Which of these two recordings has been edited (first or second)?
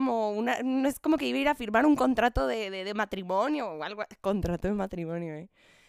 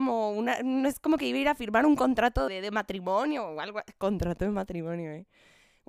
second